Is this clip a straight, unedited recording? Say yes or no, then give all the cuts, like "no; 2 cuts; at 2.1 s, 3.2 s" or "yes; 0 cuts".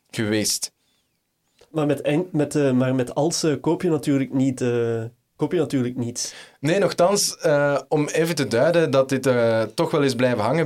yes; 0 cuts